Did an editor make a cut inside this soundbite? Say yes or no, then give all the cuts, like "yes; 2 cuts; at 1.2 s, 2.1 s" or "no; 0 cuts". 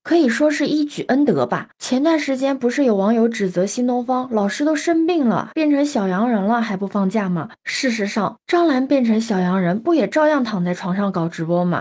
no; 0 cuts